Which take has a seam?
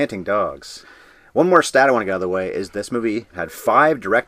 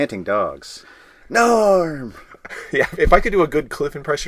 second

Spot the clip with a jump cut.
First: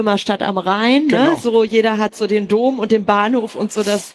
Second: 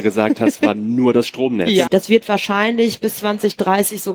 second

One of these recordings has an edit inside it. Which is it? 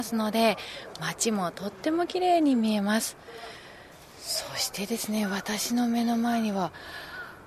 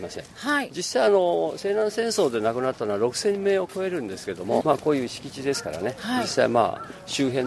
second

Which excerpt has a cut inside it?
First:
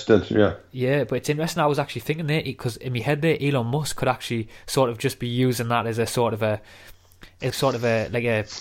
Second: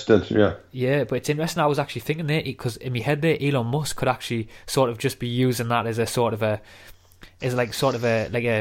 first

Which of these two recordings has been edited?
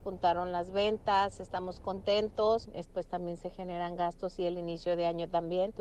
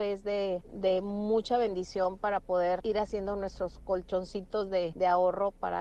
first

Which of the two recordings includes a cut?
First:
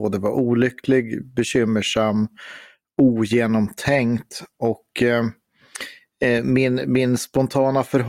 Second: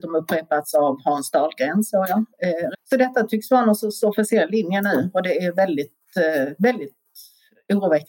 second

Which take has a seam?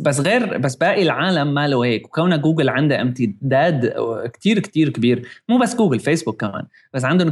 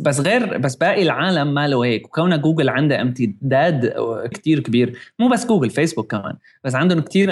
second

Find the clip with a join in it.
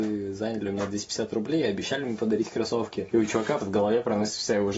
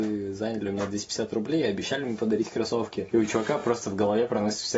first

